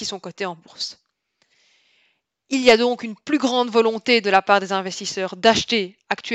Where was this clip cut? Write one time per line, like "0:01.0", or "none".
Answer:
none